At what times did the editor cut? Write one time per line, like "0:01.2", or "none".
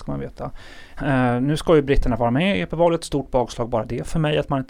0:01.0